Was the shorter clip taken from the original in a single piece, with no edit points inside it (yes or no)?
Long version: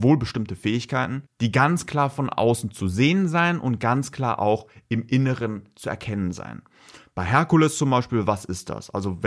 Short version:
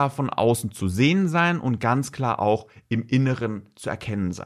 yes